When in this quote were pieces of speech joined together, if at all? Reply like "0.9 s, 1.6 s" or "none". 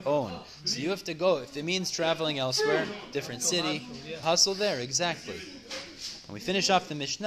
4.2 s

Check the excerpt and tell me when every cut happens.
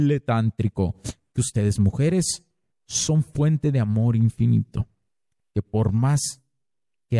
none

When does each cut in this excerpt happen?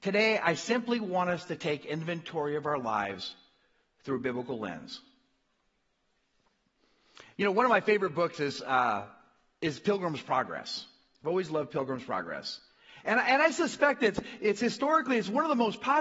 none

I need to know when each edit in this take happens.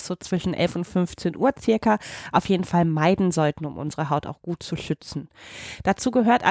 none

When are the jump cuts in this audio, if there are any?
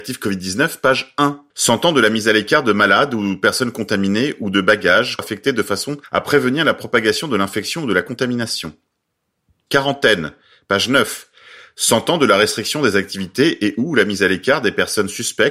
1.5 s

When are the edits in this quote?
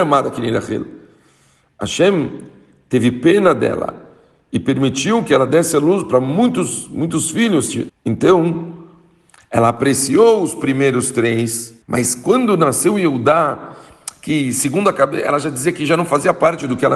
7.9 s, 11.8 s

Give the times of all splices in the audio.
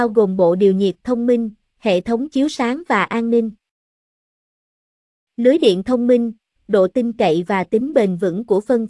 5.2 s, 6.6 s

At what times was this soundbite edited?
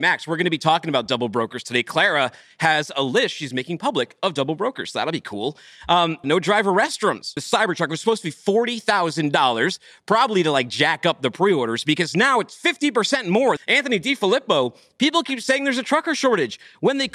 6.2 s, 7.4 s, 13.6 s

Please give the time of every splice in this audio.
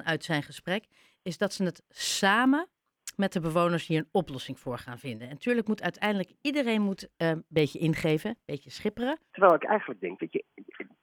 9.3 s

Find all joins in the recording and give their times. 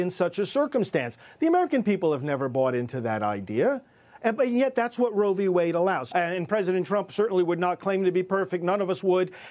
6.1 s

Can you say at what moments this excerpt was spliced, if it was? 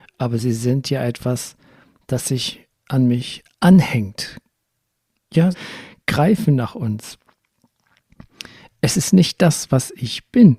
5.5 s

